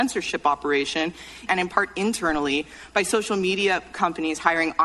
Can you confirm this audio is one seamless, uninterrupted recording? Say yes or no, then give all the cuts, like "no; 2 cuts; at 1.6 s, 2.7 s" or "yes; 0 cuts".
no; 1 cut; at 1.5 s